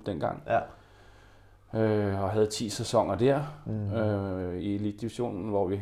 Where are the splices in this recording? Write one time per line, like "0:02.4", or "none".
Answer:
none

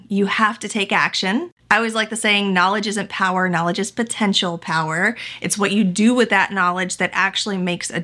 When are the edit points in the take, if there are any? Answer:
none

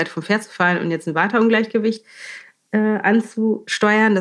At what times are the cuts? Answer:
none

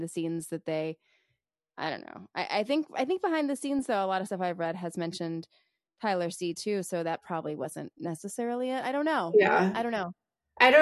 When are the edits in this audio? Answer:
none

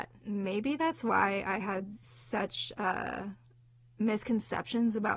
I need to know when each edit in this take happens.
none

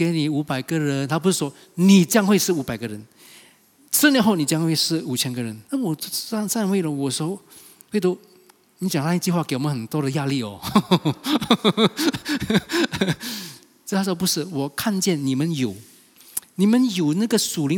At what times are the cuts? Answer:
0:05.6

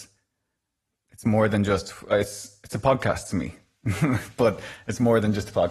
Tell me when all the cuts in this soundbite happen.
none

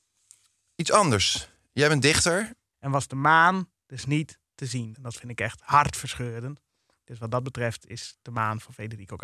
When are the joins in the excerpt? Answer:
0:02.7
0:04.9

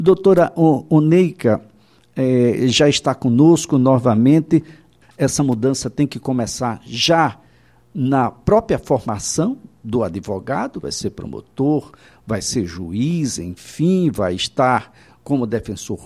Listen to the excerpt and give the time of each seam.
0:05.0
0:10.8

